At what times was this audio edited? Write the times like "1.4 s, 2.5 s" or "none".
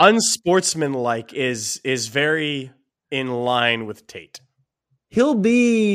none